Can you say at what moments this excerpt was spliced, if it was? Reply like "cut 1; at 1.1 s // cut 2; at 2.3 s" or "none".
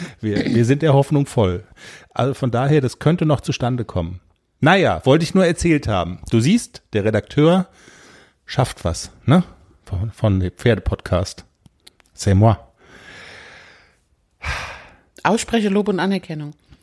none